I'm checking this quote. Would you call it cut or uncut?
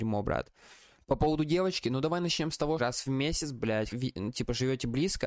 cut